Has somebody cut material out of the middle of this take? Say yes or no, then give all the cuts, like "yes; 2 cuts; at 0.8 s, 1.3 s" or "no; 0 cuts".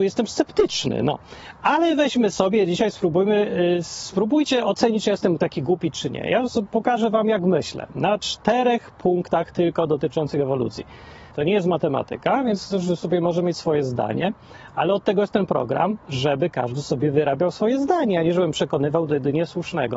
yes; 1 cut; at 11.3 s